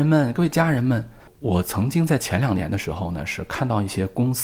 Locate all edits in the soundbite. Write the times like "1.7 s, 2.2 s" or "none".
none

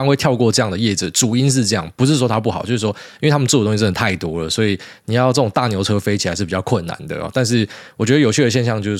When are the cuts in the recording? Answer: none

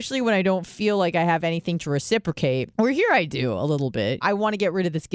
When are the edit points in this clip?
2.7 s, 4.2 s

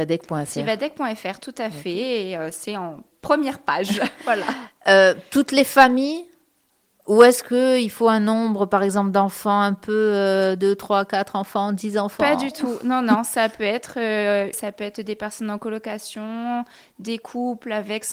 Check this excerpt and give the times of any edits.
14.5 s

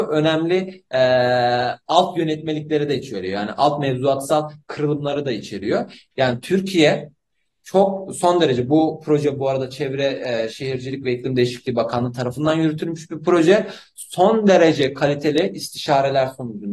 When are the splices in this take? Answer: 6.1 s

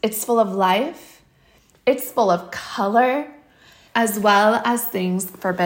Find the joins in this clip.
3.9 s

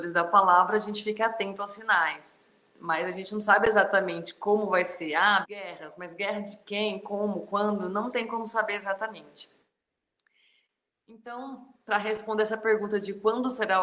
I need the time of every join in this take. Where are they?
5.4 s

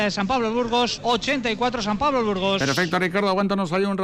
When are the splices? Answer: 1.0 s

